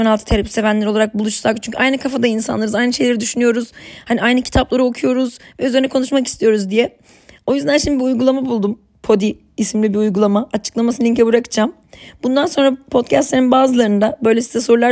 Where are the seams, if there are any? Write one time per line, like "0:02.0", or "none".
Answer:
none